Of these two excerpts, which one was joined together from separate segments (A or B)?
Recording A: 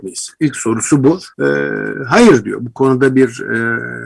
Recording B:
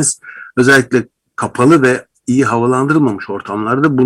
A